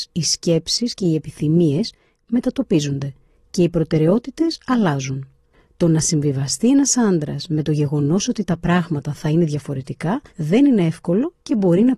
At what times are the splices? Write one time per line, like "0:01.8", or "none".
0:10.3

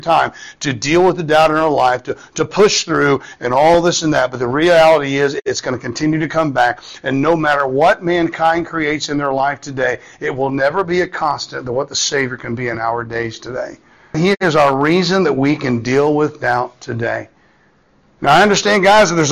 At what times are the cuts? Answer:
0:14.1

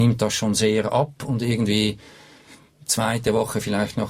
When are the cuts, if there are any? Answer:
none

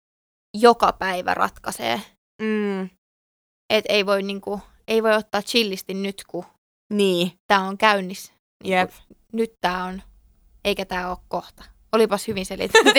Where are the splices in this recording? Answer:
none

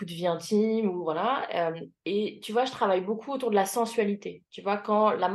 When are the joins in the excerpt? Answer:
none

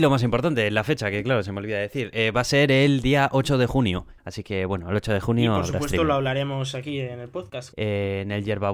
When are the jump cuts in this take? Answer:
0:04.2
0:07.7

